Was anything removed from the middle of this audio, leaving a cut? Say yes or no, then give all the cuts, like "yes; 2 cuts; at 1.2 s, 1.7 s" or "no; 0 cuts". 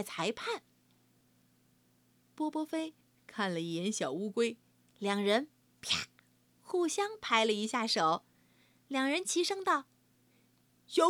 no; 0 cuts